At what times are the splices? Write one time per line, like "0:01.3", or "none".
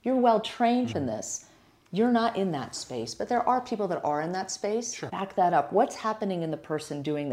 0:00.9
0:05.1